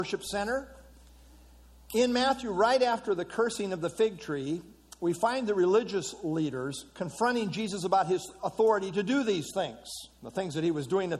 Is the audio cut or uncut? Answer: cut